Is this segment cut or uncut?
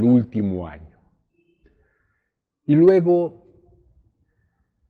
uncut